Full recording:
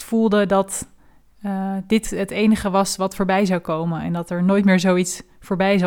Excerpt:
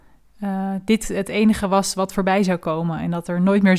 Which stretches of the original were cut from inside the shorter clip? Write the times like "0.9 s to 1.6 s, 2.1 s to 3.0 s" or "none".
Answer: none